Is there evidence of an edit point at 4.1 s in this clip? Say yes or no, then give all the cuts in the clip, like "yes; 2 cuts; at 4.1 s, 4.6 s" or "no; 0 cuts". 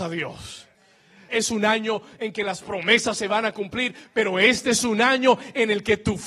no; 1 cut; at 1.3 s